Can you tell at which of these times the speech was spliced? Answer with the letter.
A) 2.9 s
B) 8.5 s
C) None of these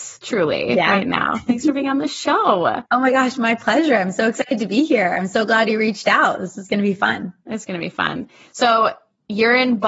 A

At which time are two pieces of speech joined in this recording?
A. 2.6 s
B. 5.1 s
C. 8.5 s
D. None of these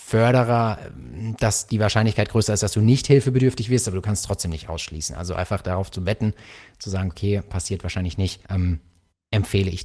C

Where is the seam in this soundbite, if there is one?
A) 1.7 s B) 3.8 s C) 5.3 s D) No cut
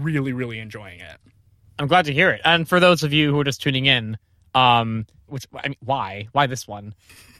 C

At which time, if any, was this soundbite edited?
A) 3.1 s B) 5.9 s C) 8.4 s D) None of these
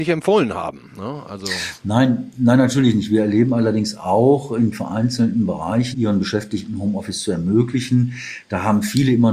B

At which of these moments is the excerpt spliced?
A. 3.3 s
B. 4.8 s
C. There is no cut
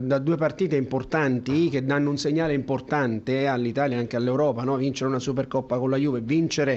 C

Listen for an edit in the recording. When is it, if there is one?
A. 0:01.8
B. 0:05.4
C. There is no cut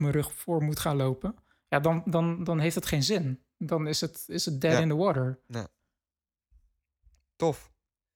C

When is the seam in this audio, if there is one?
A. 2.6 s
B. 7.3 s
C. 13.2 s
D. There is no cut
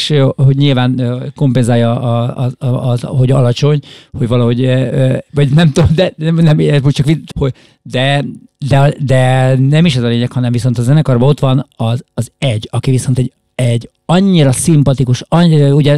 B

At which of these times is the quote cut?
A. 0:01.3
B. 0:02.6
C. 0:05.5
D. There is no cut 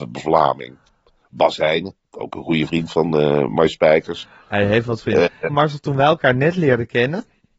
C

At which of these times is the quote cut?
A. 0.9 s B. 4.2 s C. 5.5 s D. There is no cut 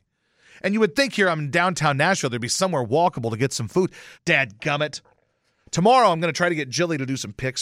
B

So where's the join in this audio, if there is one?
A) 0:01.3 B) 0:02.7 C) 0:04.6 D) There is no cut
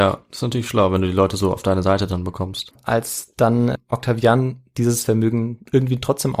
B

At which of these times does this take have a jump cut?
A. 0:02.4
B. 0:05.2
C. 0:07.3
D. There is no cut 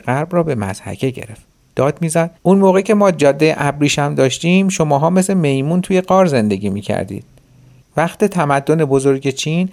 A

